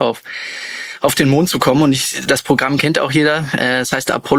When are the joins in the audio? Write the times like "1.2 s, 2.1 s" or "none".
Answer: none